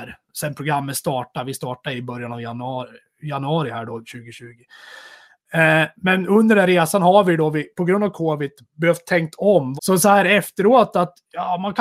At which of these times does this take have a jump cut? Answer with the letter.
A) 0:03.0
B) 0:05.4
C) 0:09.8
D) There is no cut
C